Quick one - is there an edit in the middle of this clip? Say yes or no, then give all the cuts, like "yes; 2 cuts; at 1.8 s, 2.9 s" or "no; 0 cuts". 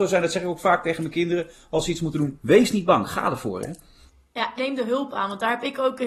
yes; 1 cut; at 4.6 s